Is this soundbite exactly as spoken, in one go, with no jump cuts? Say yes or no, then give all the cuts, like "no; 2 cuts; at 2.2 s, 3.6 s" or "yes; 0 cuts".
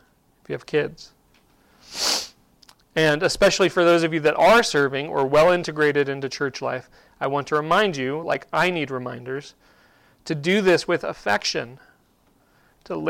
yes; 0 cuts